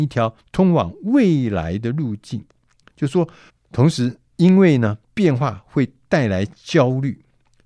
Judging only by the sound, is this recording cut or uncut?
cut